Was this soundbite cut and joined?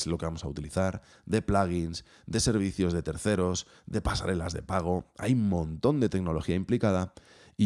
yes; 1 cut; at 1.1 s

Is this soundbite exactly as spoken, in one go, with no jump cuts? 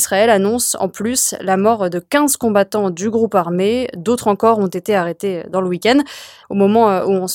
no; 1 cut; at 6.4 s

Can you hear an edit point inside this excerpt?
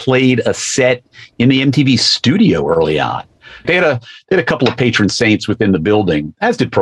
yes; 1 cut; at 3.6 s

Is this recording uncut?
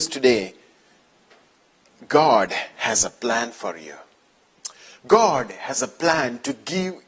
yes; 0 cuts

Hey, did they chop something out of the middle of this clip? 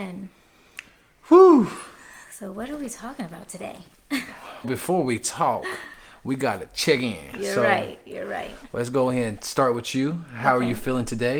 yes; 1 cut; at 4.6 s

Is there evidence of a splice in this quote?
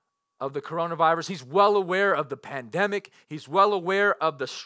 no; 0 cuts

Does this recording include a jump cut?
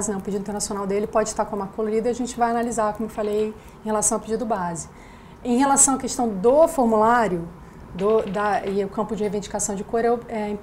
no; 0 cuts

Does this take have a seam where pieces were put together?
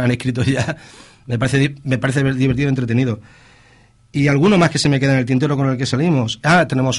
no; 0 cuts

